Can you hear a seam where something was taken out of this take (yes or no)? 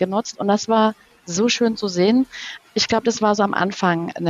no